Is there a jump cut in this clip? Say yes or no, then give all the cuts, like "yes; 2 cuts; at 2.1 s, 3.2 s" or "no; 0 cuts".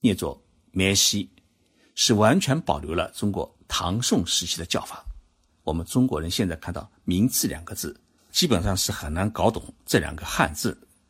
yes; 2 cuts; at 5.5 s, 8.3 s